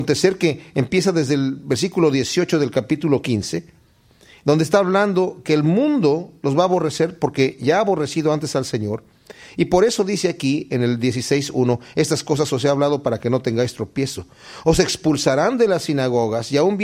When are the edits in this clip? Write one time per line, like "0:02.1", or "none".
none